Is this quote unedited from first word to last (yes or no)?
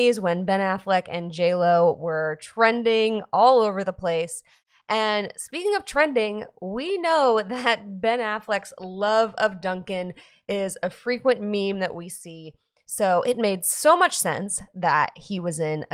yes